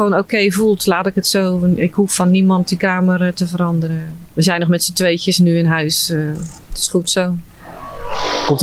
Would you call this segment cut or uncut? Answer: uncut